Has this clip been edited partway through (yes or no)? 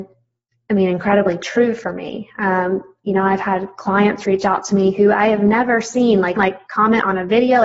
yes